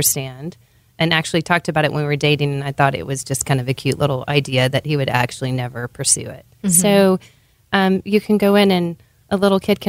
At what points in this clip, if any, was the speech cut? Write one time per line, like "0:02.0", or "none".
0:06.6
0:08.0